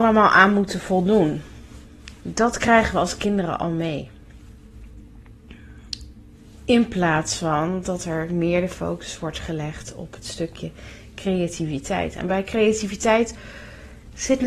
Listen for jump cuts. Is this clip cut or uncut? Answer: uncut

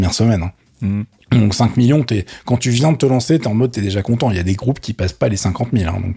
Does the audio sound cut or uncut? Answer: uncut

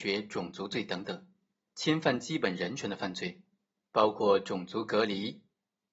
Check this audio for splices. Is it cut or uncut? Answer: cut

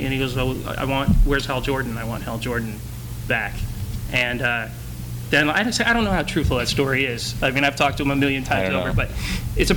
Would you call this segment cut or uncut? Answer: uncut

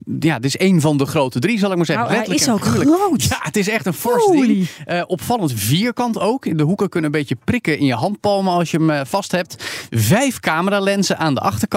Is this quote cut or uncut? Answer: uncut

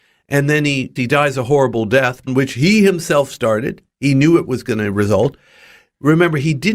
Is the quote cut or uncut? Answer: cut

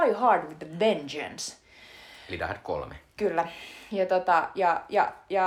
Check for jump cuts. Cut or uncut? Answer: uncut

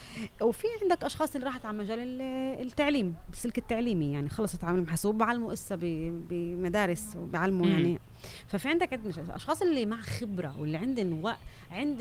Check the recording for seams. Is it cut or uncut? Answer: uncut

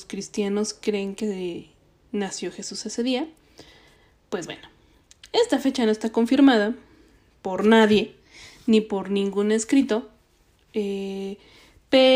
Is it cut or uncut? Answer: uncut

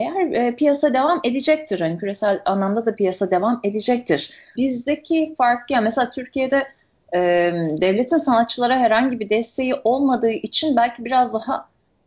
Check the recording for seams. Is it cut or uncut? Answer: cut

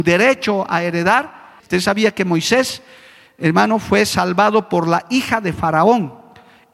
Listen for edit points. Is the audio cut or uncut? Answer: cut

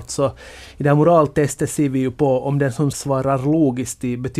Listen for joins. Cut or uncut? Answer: cut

